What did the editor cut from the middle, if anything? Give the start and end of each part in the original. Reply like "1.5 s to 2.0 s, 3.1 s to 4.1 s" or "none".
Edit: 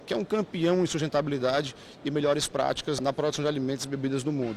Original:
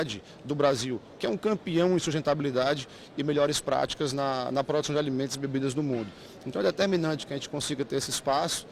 4.1 s to 4.5 s

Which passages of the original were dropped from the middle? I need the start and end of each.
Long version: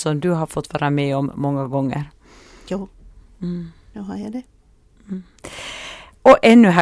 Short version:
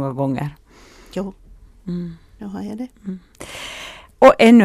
4.5 s to 5.0 s

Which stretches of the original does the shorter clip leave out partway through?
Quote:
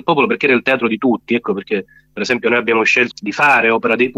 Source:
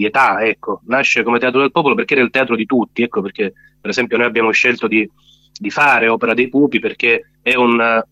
4.8 s to 5.5 s

